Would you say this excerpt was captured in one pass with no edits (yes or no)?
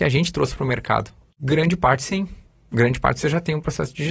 no